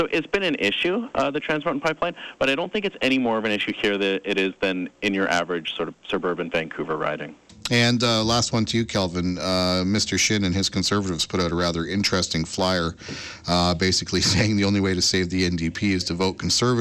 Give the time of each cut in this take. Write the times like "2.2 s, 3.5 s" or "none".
none